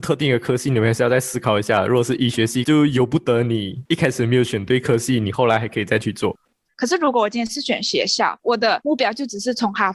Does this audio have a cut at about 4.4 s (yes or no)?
no